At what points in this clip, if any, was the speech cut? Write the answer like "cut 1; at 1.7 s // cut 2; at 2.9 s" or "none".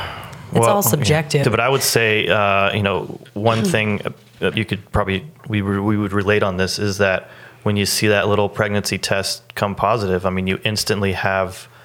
cut 1; at 1.4 s // cut 2; at 4.5 s